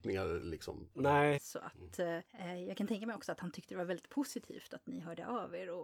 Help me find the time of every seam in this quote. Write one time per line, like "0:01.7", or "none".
0:01.4